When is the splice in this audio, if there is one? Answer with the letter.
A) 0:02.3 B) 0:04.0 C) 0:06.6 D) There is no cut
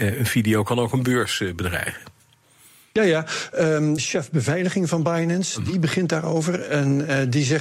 B